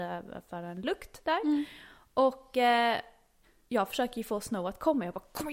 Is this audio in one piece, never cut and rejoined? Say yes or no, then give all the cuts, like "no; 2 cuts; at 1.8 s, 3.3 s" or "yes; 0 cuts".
yes; 0 cuts